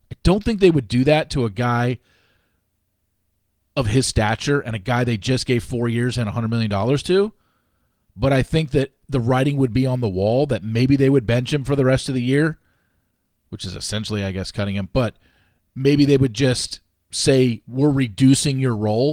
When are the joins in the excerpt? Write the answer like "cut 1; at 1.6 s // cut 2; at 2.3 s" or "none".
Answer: none